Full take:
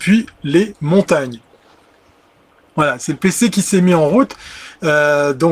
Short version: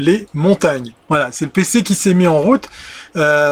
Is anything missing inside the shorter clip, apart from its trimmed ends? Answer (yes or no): yes